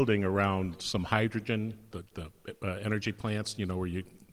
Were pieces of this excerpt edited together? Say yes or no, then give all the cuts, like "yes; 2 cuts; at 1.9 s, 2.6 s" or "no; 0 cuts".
yes; 1 cut; at 1.9 s